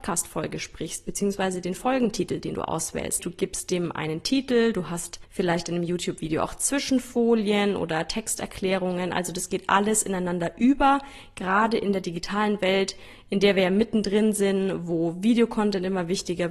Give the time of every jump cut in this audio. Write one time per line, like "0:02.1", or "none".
0:03.2